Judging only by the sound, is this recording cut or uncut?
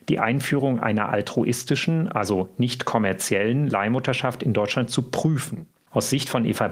uncut